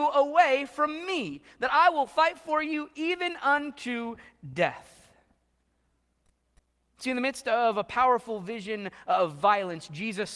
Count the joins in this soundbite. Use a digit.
0